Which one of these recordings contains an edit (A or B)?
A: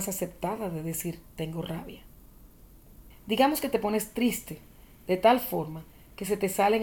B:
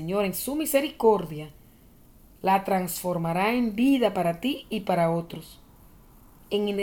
A